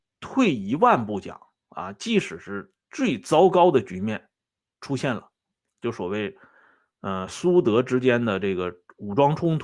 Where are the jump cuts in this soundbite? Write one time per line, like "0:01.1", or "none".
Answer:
none